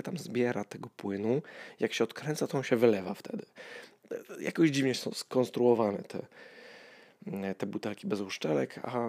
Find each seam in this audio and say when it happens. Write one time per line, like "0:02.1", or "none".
0:05.0